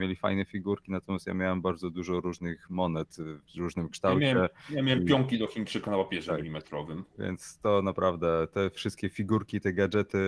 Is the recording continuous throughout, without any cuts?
no; 1 cut; at 3.4 s

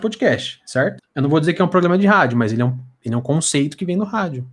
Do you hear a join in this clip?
yes; 1 cut; at 1.0 s

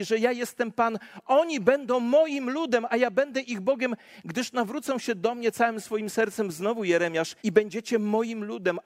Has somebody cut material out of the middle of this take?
yes; 1 cut; at 7.4 s

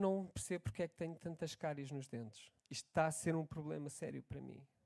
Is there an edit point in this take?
yes; 1 cut; at 2.6 s

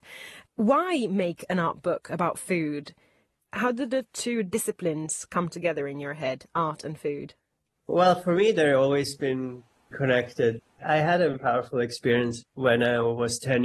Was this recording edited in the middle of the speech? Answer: yes; 1 cut; at 11.3 s

